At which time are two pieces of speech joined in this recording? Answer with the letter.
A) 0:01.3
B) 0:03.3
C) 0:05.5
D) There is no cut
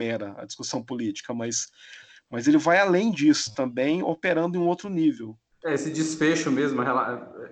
D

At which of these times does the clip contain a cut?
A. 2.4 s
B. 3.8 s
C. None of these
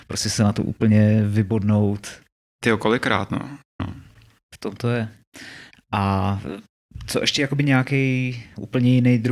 B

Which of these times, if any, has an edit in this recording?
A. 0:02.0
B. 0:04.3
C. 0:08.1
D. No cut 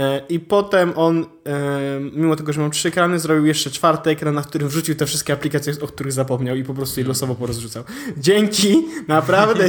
D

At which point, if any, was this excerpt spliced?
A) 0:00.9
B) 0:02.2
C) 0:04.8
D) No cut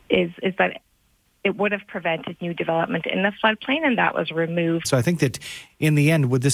C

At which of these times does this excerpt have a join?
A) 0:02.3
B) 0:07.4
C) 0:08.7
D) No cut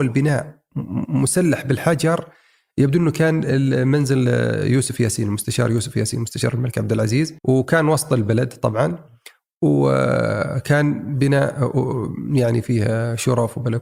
B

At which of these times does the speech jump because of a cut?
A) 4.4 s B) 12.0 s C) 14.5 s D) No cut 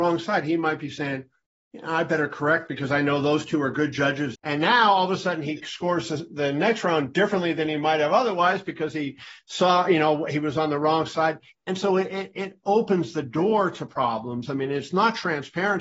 A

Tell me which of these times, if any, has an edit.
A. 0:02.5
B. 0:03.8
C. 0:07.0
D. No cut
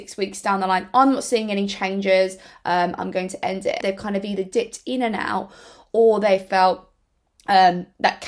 B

